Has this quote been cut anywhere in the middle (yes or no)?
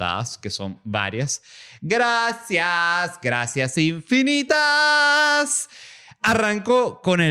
no